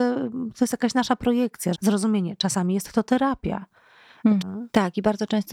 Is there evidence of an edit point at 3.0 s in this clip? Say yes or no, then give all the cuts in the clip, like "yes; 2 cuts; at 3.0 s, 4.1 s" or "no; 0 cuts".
no; 2 cuts; at 1.7 s, 4.4 s